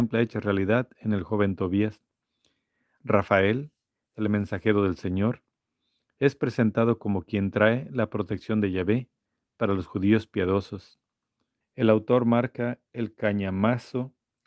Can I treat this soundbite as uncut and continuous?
no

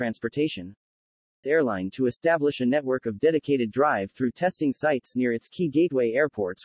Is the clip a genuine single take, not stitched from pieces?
no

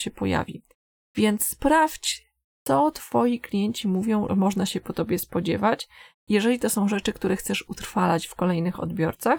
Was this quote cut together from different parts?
yes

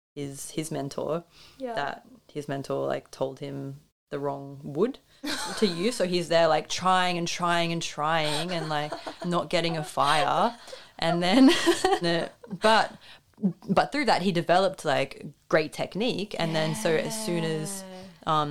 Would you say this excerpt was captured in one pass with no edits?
no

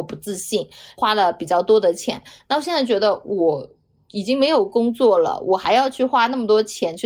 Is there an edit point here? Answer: no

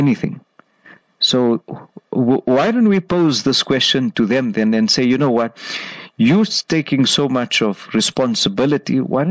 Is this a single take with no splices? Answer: yes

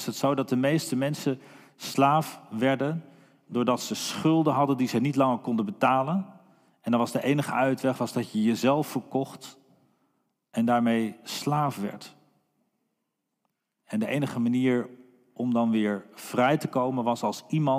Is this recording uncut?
yes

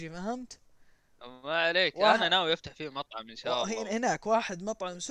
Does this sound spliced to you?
no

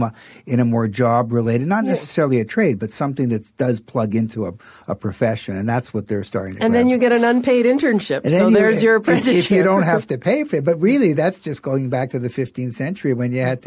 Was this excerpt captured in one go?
yes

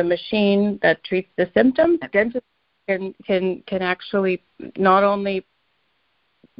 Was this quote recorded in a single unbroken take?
no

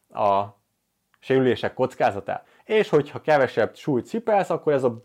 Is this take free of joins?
no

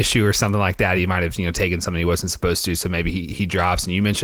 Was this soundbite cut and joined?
no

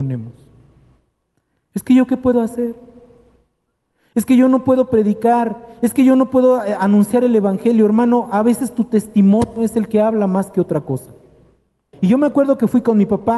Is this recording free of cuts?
no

